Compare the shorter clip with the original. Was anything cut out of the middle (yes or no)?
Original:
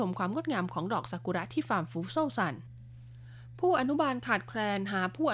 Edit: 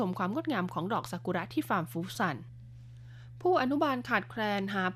yes